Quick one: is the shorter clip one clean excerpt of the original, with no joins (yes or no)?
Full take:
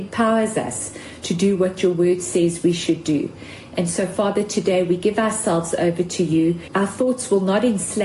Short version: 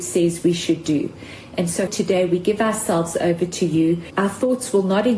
no